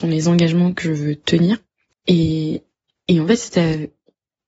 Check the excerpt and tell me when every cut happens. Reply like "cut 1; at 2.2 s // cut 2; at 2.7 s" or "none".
cut 1; at 1.9 s